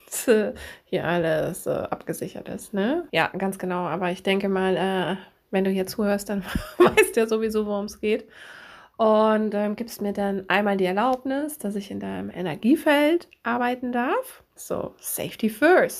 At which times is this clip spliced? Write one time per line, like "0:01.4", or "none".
0:03.1
0:14.6